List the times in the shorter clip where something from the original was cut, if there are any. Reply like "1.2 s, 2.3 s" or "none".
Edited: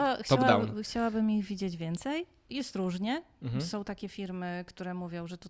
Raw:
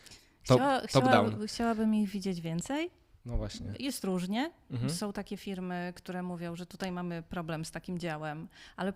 2.5 s